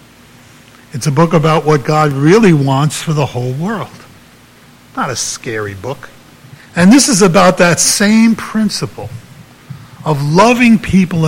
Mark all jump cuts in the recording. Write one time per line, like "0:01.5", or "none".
0:06.5